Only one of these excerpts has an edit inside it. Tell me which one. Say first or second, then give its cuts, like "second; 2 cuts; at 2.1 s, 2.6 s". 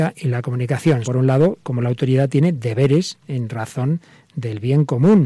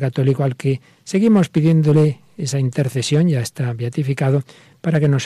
first; 1 cut; at 1.0 s